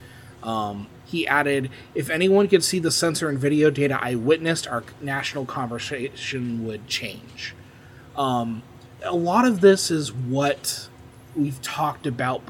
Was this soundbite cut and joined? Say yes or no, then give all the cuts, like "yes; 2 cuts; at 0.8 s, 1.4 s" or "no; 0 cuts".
yes; 1 cut; at 9.0 s